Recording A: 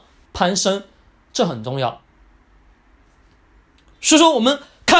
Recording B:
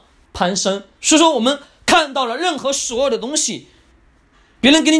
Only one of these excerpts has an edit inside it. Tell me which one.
B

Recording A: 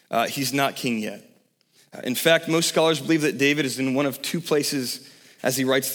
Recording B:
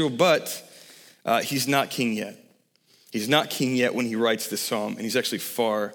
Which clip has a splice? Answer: A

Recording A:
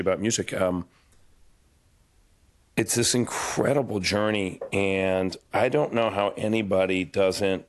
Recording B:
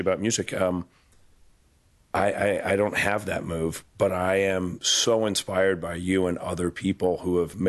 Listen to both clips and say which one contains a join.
B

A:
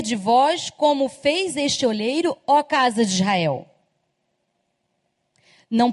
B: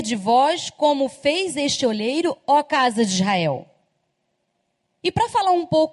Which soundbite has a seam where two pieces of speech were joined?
B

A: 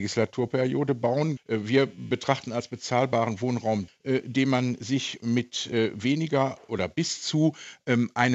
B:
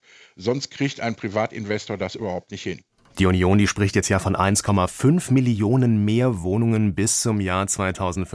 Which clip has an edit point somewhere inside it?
A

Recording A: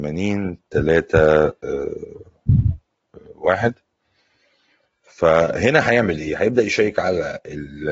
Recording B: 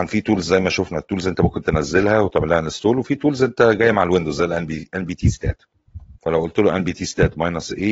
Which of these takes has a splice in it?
B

